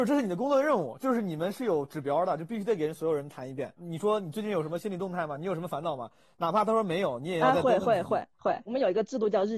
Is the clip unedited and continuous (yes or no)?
yes